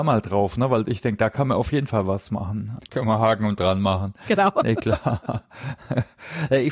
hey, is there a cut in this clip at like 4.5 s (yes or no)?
no